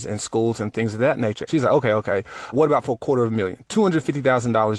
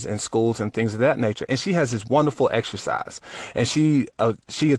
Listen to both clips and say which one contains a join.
first; 2 cuts; at 1.5 s, 2.5 s

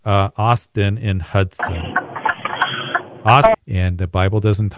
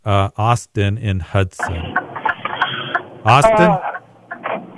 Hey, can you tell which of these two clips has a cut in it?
first; 1 cut; at 3.5 s

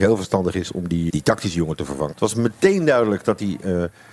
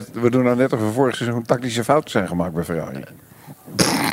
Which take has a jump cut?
first; 2 cuts; at 1.1 s, 2.1 s

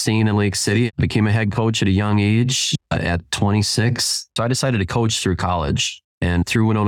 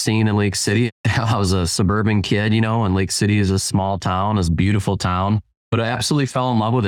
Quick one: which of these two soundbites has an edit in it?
first; 2 cuts; at 0.9 s, 4.4 s

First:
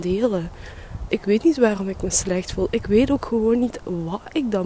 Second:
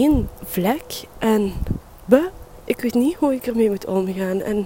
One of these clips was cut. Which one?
first; 1 cut; at 1.1 s

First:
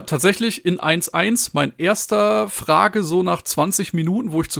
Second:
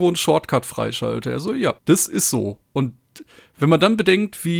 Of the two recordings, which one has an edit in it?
second; 1 cut; at 1.8 s

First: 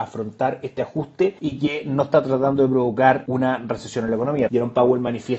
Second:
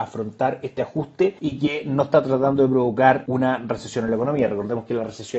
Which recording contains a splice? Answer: first; 1 cut; at 4.5 s

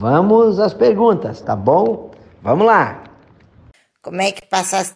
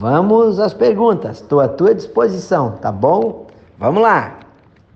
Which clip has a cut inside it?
first; 1 cut; at 1.4 s

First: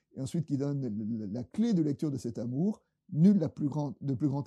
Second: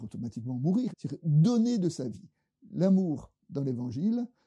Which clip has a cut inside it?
second; 1 cut; at 0.9 s

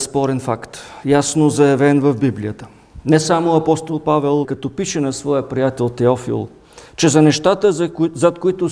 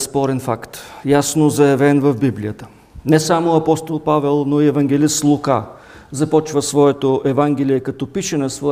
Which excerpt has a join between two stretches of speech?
first; 1 cut; at 4.4 s

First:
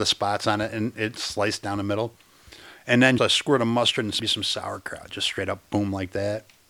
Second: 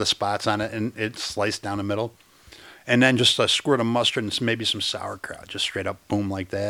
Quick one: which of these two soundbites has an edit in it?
first; 2 cuts; at 3.2 s, 4.2 s

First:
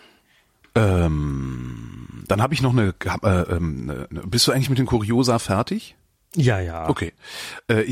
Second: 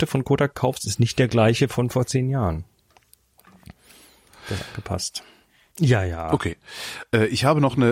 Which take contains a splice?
second; 1 cut; at 5.7 s

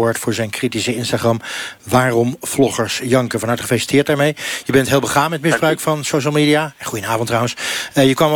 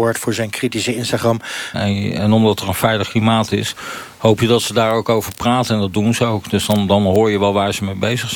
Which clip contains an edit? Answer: second; 1 cut; at 1.7 s

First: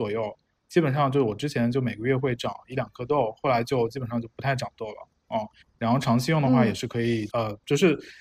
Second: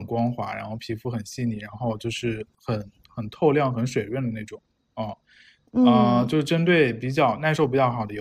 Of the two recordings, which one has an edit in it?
first; 2 cuts; at 5.6 s, 7.3 s

